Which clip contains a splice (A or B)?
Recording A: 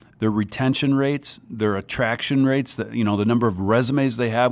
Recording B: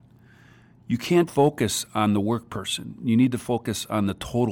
B